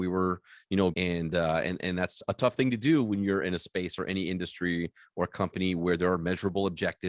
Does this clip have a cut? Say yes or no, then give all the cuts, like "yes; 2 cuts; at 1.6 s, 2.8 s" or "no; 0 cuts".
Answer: yes; 1 cut; at 0.9 s